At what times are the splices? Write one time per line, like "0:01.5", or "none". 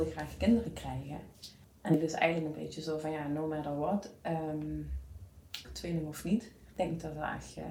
0:05.6